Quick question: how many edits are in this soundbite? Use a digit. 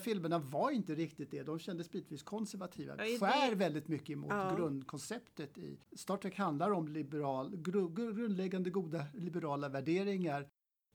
2